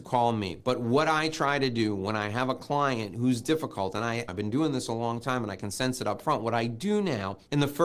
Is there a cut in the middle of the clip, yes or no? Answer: yes